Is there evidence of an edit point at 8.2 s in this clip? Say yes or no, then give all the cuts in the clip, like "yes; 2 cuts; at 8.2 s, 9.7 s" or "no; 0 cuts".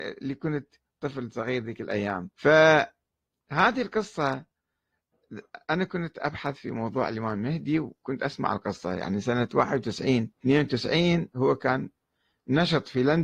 no; 2 cuts; at 2.3 s, 10.3 s